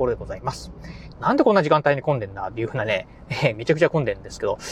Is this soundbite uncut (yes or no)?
no